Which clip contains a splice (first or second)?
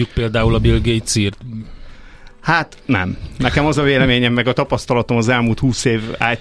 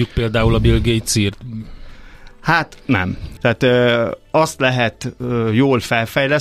second